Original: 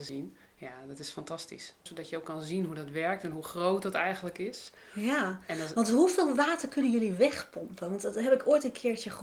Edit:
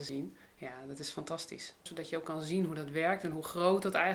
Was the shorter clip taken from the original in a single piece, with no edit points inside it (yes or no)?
yes